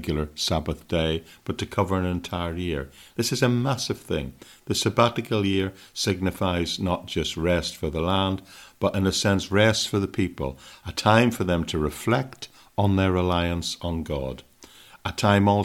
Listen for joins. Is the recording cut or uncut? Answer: uncut